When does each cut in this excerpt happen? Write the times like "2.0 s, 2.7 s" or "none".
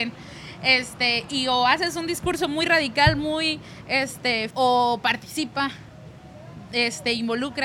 4.5 s